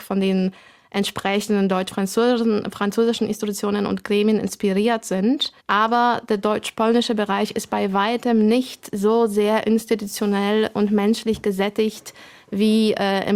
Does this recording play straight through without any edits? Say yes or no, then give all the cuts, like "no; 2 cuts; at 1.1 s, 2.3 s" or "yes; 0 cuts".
no; 1 cut; at 5.6 s